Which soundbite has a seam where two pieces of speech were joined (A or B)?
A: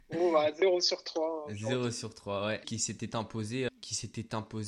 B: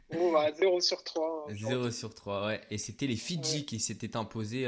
A